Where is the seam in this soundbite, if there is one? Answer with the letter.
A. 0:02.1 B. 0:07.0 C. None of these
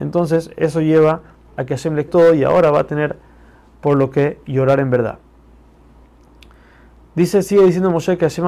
A